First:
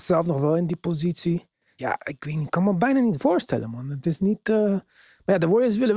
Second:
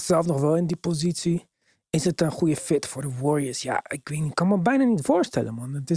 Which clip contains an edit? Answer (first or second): first